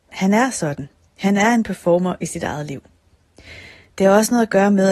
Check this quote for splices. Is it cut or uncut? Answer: uncut